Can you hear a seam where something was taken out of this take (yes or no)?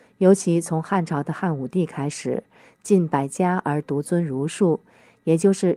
no